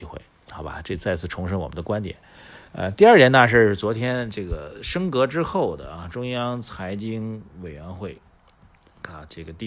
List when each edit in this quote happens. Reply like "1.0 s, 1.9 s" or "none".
2.7 s

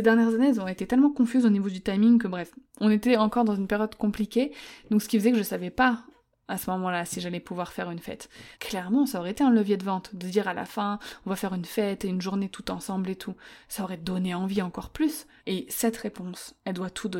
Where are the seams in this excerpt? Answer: 8.5 s, 15.4 s

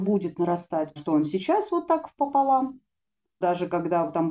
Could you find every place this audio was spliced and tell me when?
1.0 s, 3.4 s

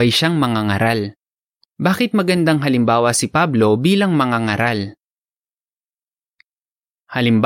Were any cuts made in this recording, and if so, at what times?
1.7 s

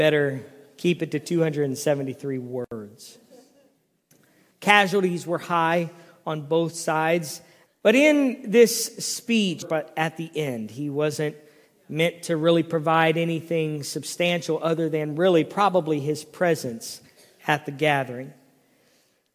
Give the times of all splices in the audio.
4.5 s, 7.7 s, 9.6 s

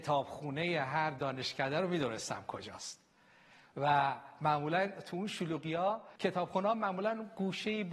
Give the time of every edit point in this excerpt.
6.2 s

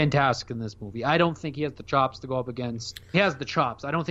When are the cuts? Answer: 3.1 s

